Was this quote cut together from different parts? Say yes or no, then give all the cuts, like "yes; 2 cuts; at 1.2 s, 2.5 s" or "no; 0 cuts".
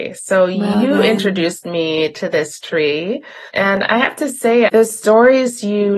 yes; 1 cut; at 4.7 s